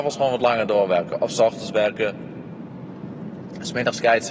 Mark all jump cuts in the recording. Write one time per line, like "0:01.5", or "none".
none